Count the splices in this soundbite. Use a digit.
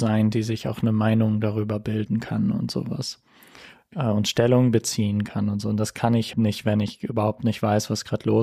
1